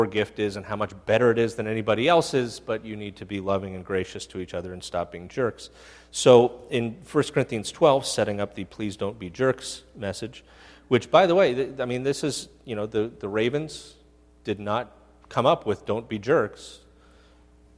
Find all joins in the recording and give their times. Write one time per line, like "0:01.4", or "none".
none